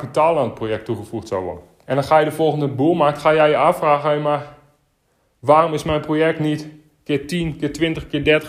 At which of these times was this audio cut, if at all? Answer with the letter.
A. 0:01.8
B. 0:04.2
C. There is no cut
A